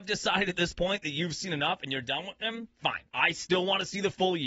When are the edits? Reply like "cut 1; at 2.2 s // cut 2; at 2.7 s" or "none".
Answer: cut 1; at 3.1 s